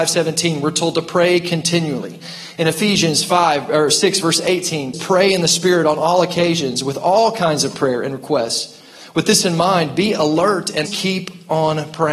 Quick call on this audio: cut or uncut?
cut